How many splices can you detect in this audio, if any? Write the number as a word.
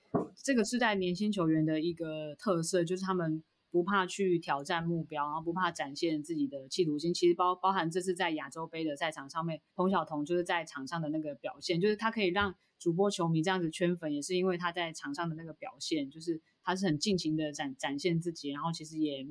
one